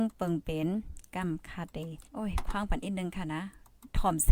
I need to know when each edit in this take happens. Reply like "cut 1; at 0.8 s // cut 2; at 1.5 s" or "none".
cut 1; at 2.1 s